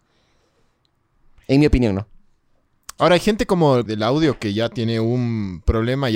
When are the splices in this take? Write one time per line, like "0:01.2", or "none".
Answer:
0:03.9